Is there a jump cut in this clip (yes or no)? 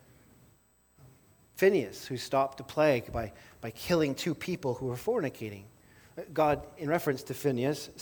no